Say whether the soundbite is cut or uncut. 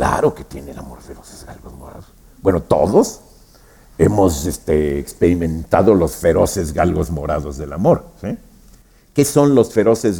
uncut